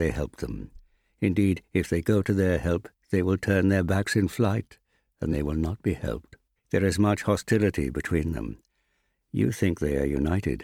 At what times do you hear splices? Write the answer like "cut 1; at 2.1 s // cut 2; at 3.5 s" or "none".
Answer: cut 1; at 5.3 s // cut 2; at 6.6 s